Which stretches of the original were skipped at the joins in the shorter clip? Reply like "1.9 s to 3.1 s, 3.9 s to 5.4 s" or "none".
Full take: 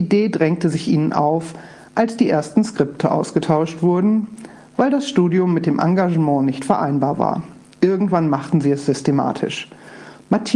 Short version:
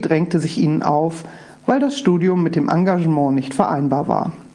1.8 s to 4.6 s